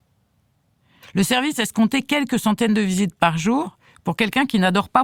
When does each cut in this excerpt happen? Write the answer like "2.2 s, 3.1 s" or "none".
1.0 s, 3.9 s